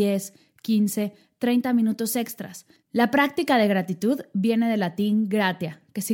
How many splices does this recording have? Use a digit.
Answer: 1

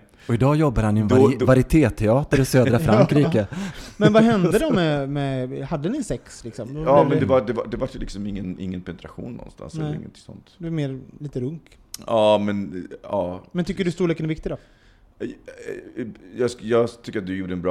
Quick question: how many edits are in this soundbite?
0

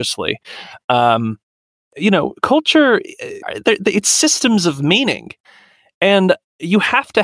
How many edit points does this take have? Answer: 1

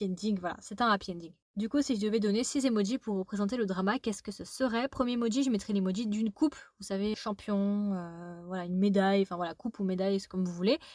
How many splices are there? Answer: 1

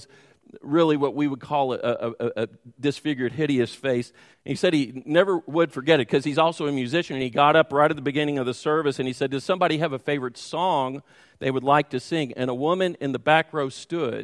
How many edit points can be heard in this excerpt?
1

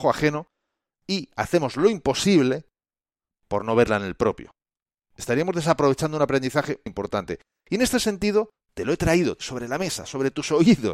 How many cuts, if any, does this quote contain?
2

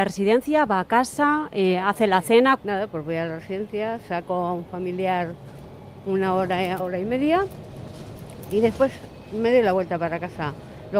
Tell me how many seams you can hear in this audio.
2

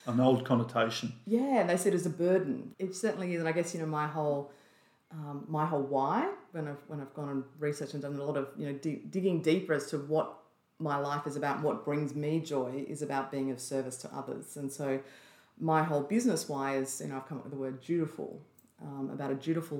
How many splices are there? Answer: 1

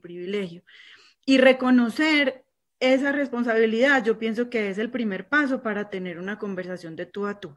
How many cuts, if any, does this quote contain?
0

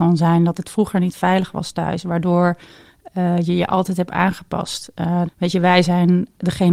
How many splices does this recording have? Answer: 1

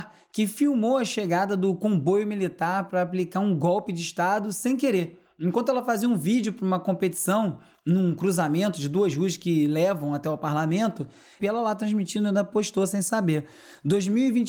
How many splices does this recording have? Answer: 1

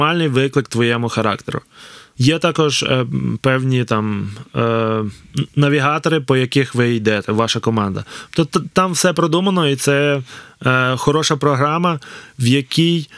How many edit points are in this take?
1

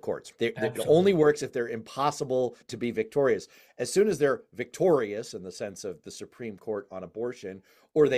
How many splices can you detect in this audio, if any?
0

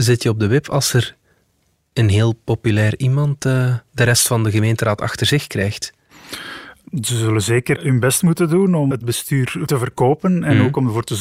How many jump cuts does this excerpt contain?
3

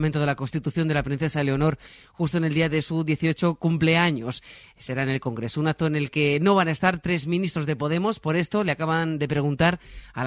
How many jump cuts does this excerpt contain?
0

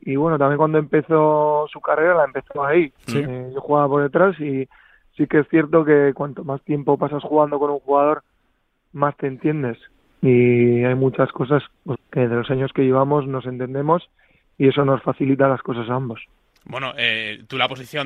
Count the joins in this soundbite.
1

